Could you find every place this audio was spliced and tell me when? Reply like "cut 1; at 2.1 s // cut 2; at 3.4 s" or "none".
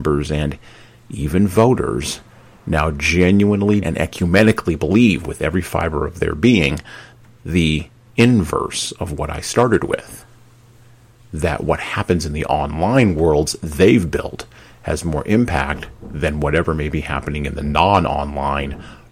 cut 1; at 3.8 s

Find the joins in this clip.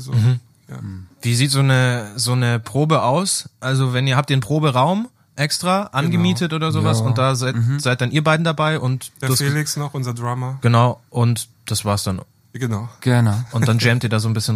none

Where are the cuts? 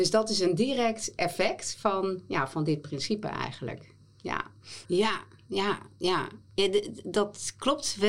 cut 1; at 4.8 s

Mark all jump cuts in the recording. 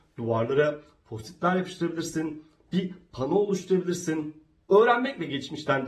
cut 1; at 4.6 s

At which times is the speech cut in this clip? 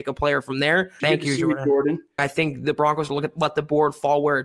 cut 1; at 1.0 s // cut 2; at 2.2 s

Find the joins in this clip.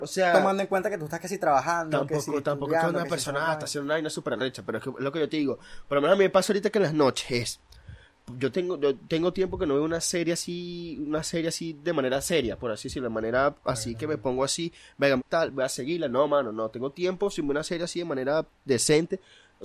cut 1; at 8.5 s // cut 2; at 15.2 s

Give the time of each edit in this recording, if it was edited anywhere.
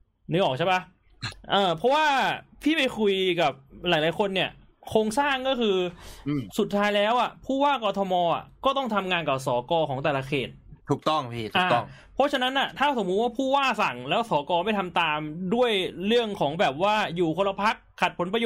cut 1; at 10.8 s

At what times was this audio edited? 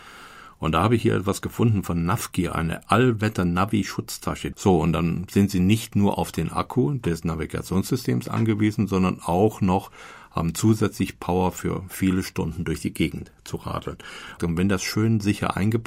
cut 1; at 4.5 s // cut 2; at 14.4 s

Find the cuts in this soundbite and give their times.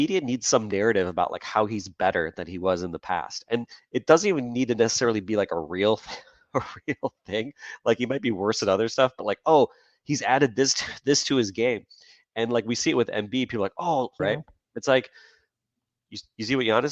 cut 1; at 14.2 s

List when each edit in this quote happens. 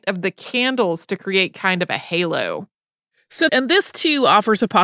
cut 1; at 3.5 s

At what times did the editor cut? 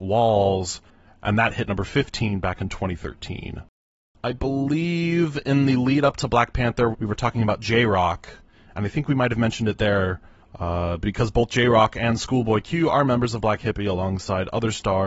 cut 1; at 4.2 s // cut 2; at 6.9 s

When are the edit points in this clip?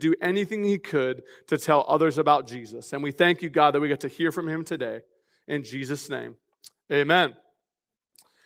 none

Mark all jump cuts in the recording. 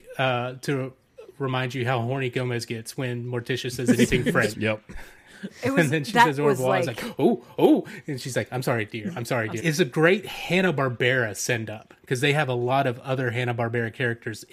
cut 1; at 4.5 s // cut 2; at 9.6 s

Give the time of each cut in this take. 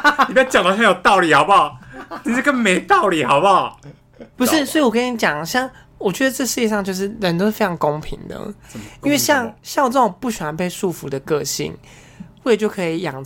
cut 1; at 4.4 s // cut 2; at 9.6 s

